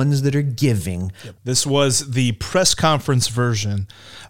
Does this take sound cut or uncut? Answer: cut